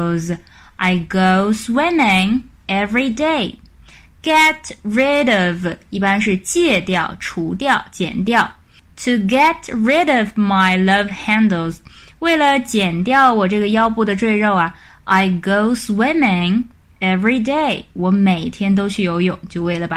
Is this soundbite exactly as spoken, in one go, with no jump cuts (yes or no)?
yes